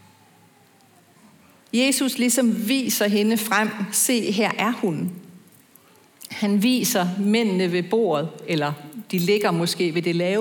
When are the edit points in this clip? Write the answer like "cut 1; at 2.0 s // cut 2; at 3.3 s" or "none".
none